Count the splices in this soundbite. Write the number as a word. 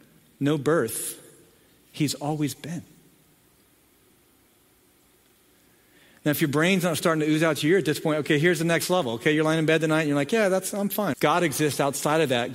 one